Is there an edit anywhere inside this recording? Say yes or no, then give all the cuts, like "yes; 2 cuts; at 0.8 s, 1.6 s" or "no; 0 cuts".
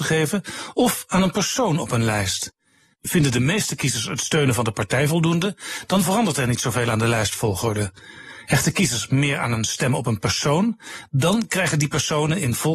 no; 0 cuts